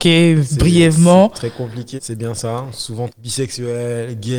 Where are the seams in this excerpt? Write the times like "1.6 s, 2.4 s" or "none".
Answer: 2.0 s, 3.1 s